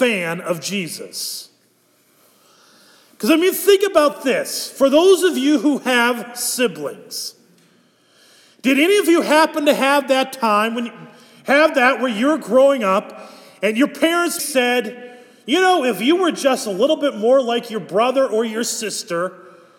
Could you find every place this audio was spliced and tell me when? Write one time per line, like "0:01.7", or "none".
0:14.4